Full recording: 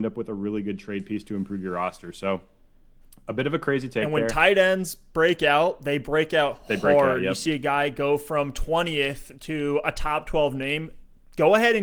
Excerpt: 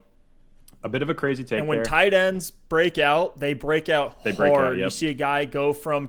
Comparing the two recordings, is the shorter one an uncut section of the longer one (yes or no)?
yes